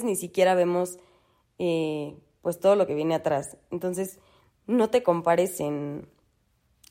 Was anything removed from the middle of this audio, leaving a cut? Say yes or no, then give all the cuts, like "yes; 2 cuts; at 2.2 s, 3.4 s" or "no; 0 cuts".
no; 0 cuts